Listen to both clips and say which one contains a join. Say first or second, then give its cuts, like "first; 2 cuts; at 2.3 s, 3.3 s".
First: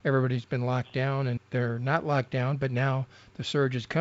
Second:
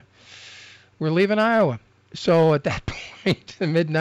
first; 1 cut; at 1.4 s